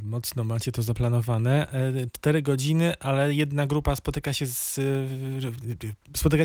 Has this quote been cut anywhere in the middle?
no; 0 cuts

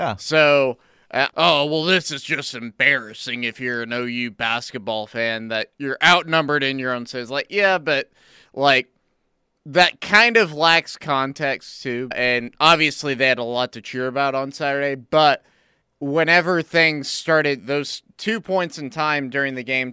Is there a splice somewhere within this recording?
yes; 3 cuts; at 1.3 s, 12.1 s, 15.8 s

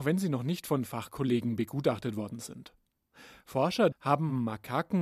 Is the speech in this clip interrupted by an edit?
yes; 1 cut; at 3.9 s

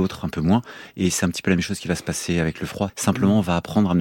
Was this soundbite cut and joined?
yes; 1 cut; at 2.9 s

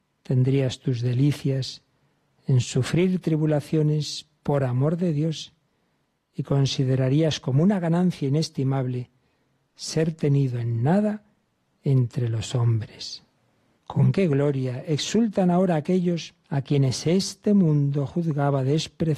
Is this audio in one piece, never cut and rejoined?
no; 2 cuts; at 13.8 s, 16.4 s

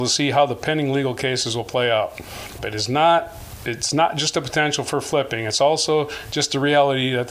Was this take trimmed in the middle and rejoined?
yes; 1 cut; at 2.6 s

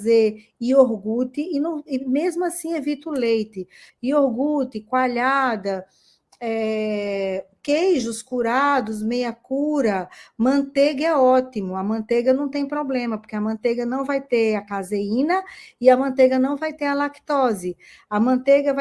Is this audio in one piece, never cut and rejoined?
no; 1 cut; at 3.9 s

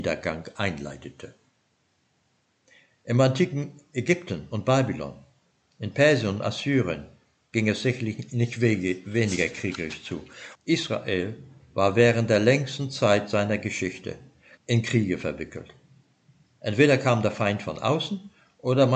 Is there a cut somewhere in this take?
yes; 2 cuts; at 10.6 s, 14.6 s

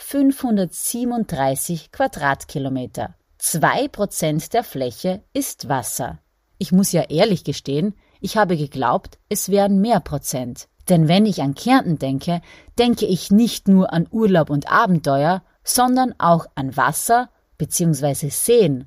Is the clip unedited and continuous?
yes; 0 cuts

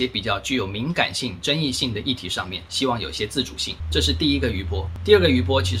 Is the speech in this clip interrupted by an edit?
no; 0 cuts

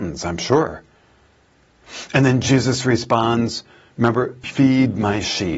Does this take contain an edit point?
yes; 1 cut; at 4.4 s

